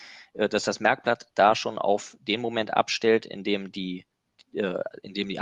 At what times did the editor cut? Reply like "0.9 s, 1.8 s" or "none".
none